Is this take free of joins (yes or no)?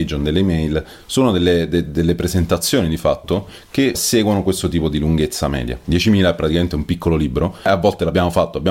no